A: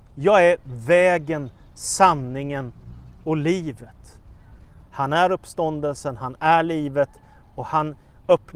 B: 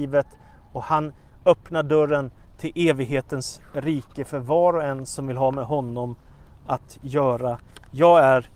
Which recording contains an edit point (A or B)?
A